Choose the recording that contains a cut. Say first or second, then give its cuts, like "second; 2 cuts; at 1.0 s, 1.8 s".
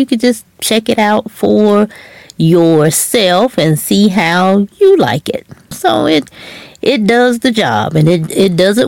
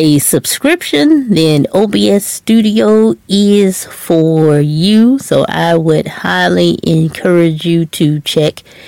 first; 1 cut; at 5.7 s